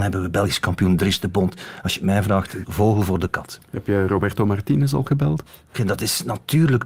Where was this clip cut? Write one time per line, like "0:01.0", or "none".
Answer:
0:02.6
0:05.7

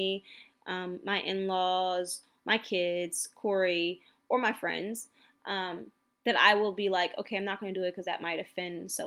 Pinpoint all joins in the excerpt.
none

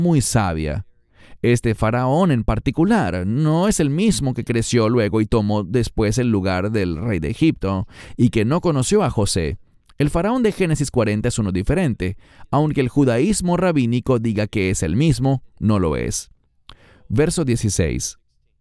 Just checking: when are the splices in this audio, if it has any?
none

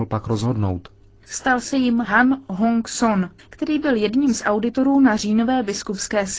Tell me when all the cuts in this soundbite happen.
0:01.2
0:03.4

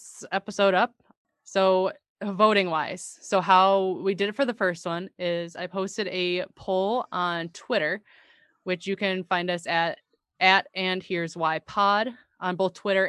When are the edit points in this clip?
none

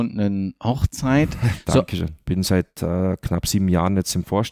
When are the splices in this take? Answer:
0:02.2

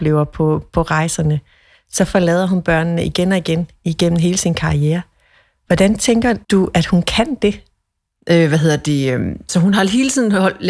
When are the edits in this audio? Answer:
0:06.4
0:08.2

